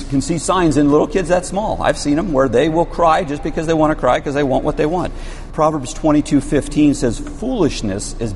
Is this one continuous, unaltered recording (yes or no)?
no